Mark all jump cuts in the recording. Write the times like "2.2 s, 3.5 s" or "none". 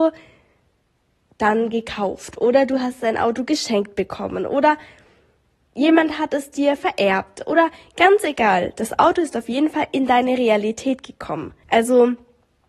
11.6 s